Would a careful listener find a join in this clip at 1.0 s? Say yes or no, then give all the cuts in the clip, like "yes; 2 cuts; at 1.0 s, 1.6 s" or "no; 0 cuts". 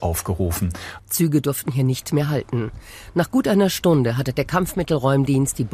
yes; 1 cut; at 1.0 s